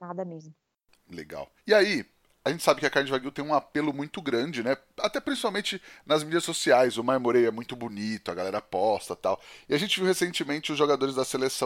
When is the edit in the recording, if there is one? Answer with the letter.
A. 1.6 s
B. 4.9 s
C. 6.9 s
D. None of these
A